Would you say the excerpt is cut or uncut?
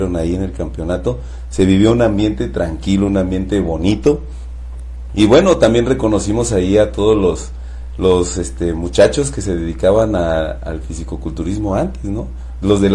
uncut